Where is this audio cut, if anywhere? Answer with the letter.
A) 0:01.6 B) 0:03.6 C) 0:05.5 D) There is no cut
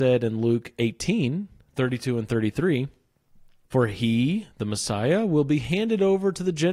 B